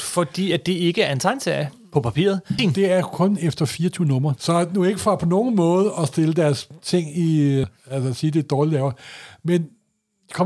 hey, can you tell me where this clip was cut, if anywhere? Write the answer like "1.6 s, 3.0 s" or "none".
2.6 s, 4.4 s, 7.6 s